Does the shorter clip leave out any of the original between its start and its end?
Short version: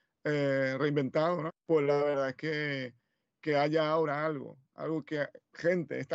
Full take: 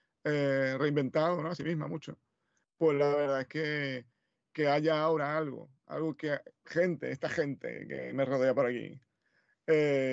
yes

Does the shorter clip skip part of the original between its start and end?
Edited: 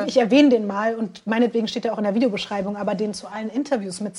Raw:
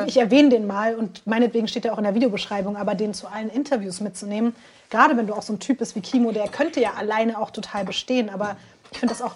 no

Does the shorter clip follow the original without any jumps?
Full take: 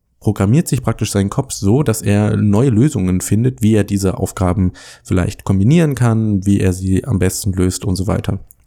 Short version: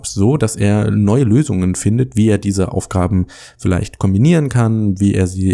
yes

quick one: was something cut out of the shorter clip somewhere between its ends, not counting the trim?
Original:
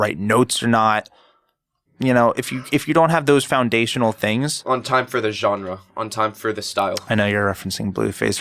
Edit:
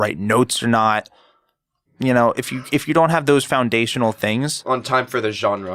no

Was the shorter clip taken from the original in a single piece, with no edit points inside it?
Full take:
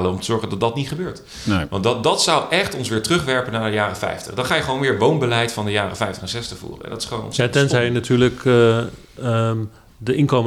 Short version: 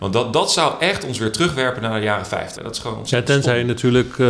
no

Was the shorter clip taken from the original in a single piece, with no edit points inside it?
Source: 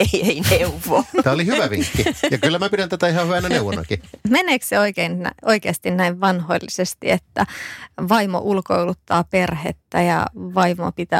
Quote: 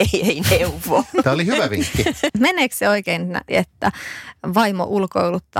no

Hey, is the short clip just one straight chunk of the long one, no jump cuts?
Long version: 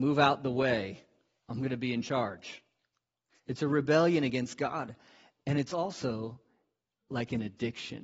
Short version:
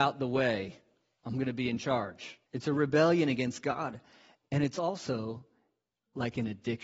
no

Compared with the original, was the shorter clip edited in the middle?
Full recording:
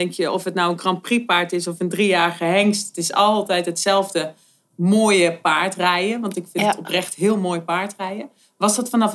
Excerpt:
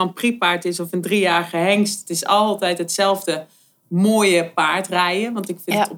no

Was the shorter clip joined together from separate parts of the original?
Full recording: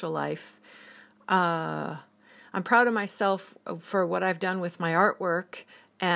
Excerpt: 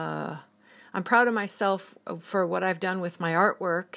no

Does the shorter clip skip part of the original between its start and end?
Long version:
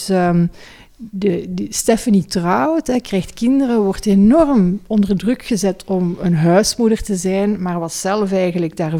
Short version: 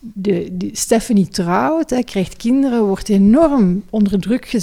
no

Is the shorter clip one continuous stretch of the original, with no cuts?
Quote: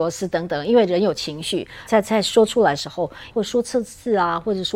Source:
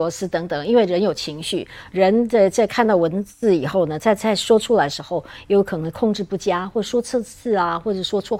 no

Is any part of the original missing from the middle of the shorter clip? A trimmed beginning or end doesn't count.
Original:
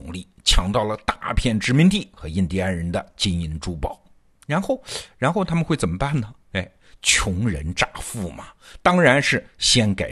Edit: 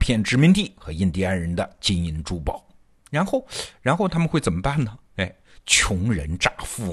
no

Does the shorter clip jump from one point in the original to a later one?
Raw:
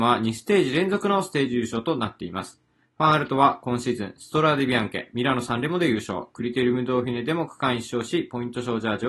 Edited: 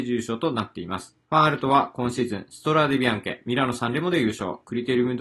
yes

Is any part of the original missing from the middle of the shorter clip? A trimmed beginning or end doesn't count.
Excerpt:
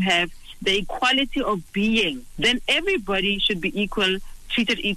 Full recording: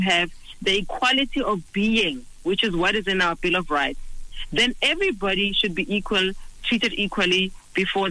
yes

